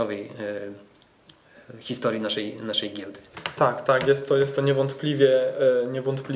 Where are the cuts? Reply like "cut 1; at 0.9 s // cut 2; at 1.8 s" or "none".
none